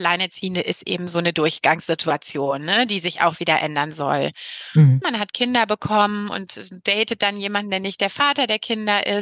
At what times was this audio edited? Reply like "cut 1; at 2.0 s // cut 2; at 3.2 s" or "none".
cut 1; at 5.0 s